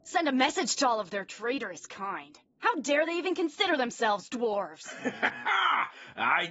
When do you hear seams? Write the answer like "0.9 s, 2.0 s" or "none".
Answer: none